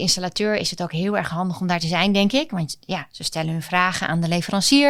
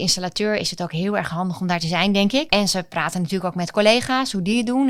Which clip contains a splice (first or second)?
second